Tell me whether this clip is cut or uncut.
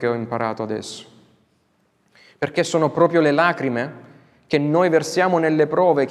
uncut